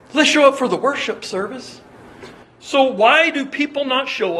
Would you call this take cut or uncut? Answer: cut